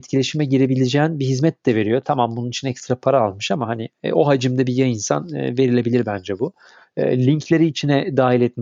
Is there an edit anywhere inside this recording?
no; 0 cuts

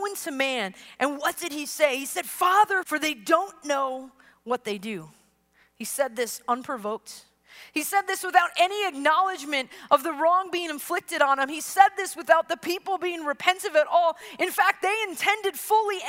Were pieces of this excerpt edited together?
yes; 1 cut; at 2.8 s

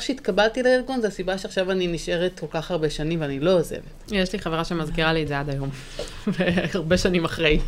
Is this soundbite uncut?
yes; 0 cuts

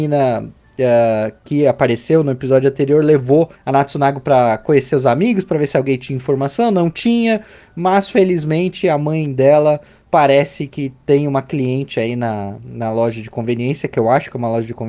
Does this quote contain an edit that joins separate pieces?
no; 0 cuts

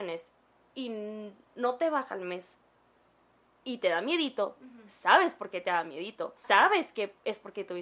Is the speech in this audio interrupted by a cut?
yes; 1 cut; at 6.4 s

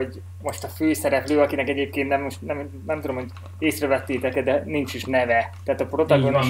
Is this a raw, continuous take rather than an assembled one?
yes; 0 cuts

